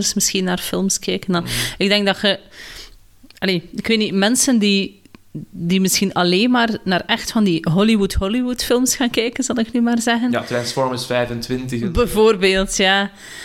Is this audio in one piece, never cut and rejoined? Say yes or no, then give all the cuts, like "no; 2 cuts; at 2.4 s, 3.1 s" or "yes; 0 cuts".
yes; 0 cuts